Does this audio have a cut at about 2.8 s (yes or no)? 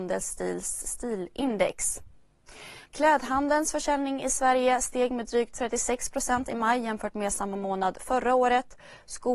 yes